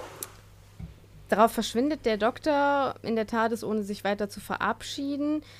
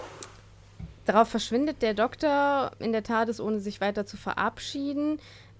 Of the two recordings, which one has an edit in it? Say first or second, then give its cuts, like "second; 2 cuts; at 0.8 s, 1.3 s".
second; 1 cut; at 1.0 s